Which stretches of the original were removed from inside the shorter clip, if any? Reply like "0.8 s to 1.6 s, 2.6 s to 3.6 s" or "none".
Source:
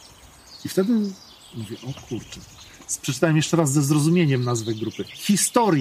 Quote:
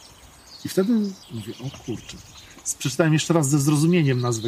1.2 s to 1.5 s